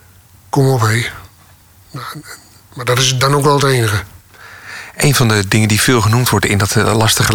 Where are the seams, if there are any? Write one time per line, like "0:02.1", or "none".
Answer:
none